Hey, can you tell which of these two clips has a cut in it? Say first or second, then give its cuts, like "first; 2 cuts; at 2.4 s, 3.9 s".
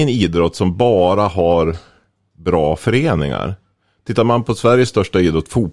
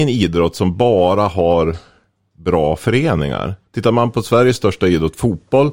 second; 1 cut; at 3.6 s